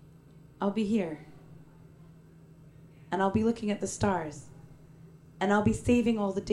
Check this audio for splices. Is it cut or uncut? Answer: uncut